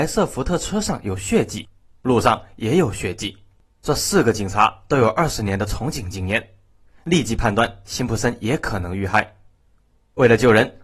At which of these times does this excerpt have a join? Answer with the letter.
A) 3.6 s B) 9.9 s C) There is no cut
C